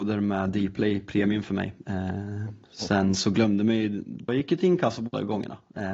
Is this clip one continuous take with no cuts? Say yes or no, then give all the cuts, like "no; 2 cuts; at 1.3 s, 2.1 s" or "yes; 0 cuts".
no; 1 cut; at 4.3 s